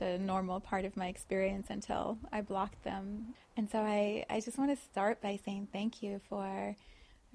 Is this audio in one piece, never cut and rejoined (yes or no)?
no